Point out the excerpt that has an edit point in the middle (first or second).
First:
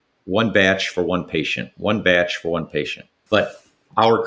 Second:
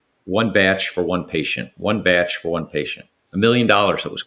first